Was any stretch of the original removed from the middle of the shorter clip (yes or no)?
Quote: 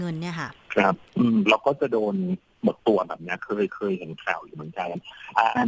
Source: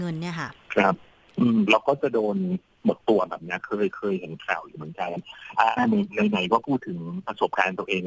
yes